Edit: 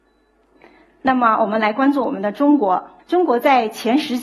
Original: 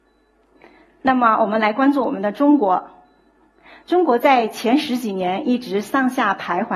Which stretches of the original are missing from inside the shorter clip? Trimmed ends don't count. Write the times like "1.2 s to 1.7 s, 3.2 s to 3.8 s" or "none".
3.0 s to 3.8 s